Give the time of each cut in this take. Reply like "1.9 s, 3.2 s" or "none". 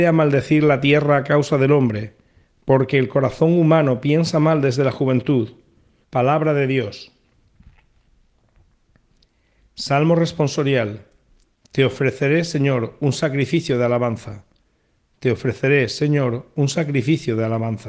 6.0 s